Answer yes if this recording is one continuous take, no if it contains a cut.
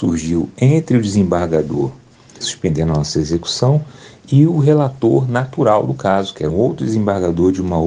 no